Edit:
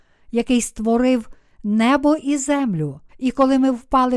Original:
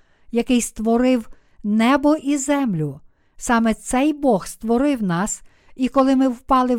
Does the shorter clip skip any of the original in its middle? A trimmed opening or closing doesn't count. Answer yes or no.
yes